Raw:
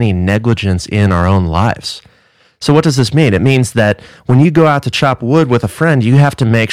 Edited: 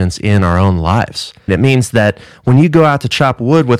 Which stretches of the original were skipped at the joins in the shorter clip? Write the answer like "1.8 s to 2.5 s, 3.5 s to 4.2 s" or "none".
2.2 s to 3.3 s